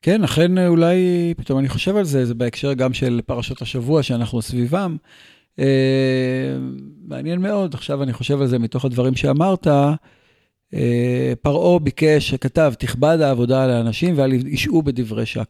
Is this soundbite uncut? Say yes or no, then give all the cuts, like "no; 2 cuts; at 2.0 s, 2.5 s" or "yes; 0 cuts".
yes; 0 cuts